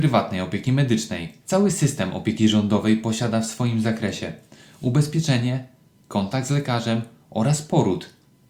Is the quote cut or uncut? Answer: cut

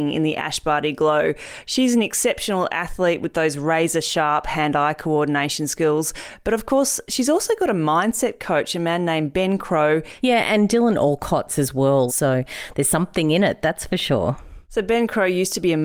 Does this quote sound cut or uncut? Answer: cut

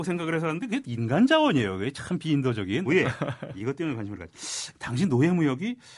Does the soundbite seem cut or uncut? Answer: cut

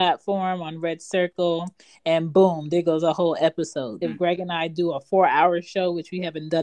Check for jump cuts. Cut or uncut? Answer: cut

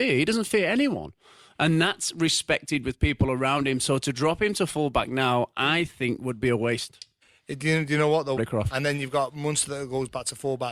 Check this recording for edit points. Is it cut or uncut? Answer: cut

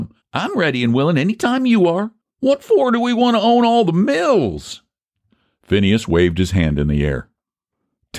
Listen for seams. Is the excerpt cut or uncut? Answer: cut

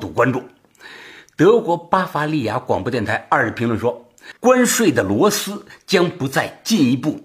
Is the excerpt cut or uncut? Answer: cut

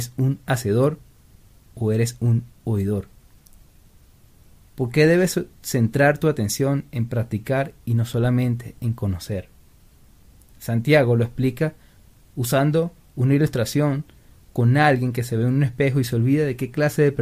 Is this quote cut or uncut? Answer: uncut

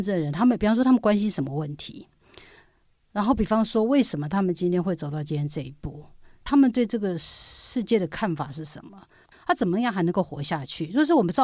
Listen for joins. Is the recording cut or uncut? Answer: cut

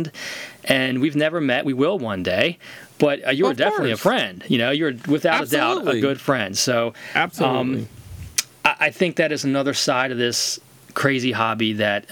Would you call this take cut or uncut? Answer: uncut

